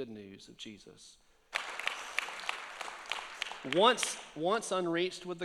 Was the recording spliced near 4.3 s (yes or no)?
no